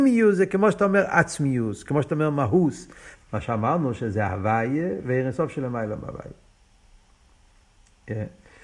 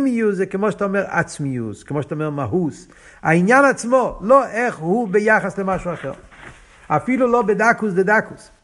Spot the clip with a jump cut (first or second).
first